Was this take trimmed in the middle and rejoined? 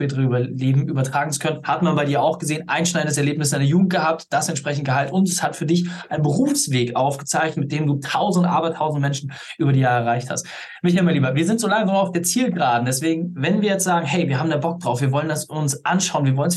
no; 0 cuts

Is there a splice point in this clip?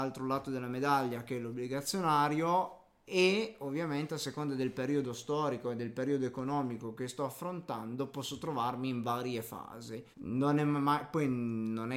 yes; 1 cut; at 10.1 s

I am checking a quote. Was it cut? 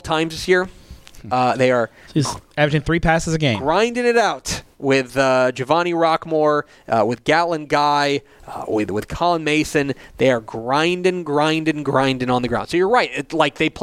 no; 0 cuts

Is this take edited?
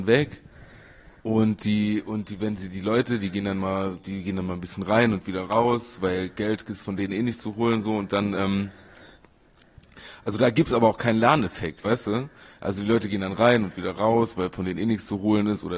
no; 0 cuts

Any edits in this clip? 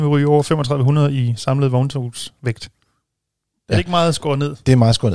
no; 0 cuts

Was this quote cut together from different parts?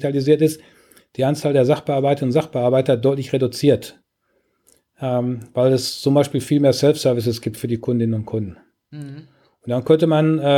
no; 0 cuts

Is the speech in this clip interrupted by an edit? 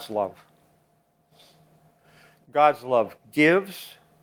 no; 0 cuts

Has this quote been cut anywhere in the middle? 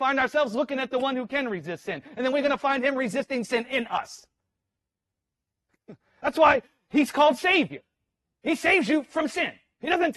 no; 0 cuts

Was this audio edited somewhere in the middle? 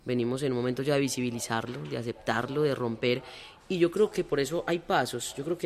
no; 0 cuts

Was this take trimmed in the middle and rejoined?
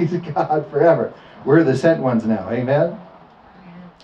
no; 0 cuts

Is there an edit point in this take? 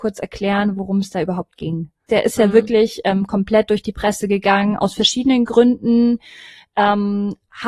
yes; 1 cut; at 2.1 s

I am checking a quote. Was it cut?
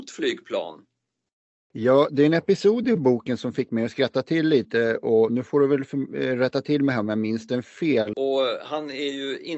yes; 2 cuts; at 1.7 s, 8.1 s

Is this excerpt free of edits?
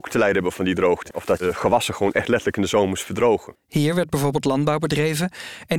no; 2 cuts; at 1.1 s, 3.6 s

